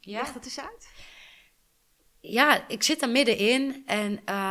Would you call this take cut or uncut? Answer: uncut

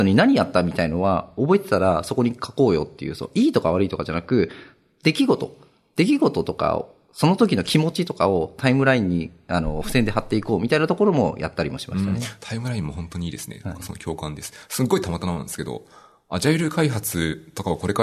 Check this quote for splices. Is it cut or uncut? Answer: uncut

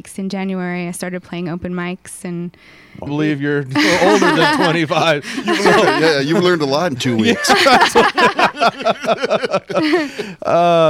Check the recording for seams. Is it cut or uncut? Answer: cut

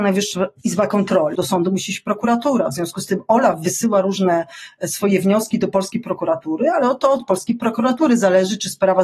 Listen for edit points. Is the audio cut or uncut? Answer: cut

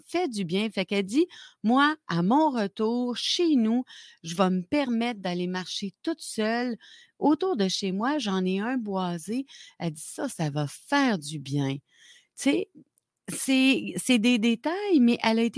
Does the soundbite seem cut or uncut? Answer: uncut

